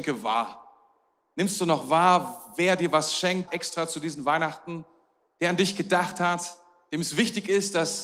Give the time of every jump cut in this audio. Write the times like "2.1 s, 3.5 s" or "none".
3.5 s

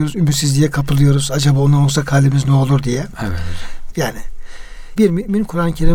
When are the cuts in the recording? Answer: 3.9 s

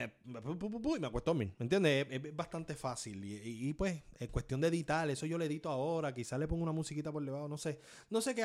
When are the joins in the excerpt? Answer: none

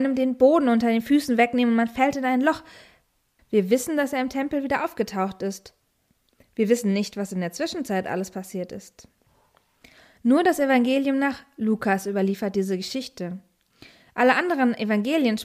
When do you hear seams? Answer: 3.4 s

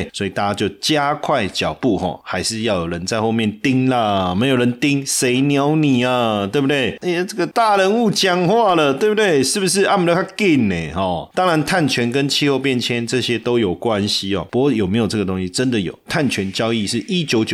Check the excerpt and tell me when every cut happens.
14.5 s

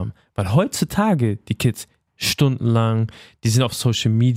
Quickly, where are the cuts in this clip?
2.1 s

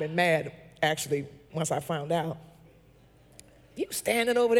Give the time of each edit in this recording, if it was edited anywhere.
1.5 s

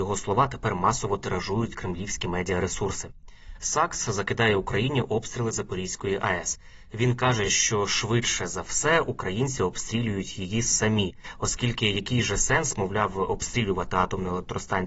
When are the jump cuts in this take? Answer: none

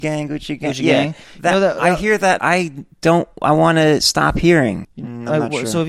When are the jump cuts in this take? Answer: 2.4 s, 4.8 s

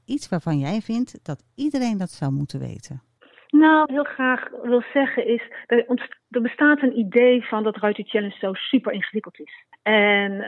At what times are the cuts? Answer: 3.9 s

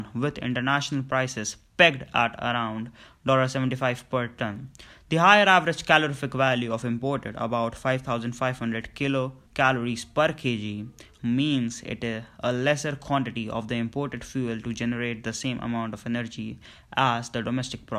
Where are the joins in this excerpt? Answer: 9.5 s, 11.2 s

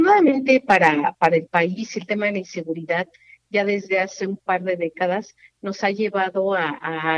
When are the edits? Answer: none

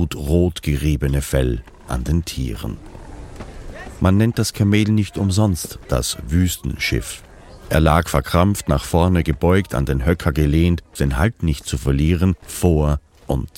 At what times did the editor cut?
11.0 s, 12.4 s

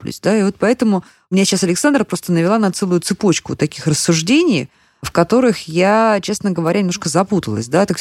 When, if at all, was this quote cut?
none

